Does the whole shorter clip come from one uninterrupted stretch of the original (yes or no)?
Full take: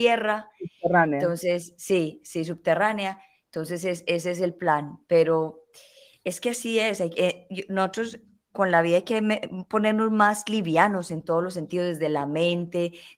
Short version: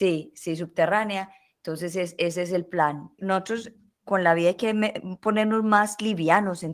no